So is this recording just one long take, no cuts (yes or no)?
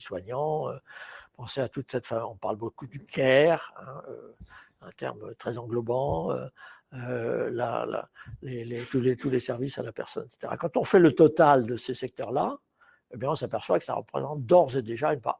yes